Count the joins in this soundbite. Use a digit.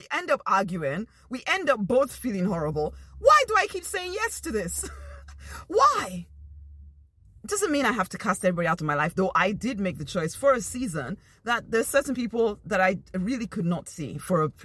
1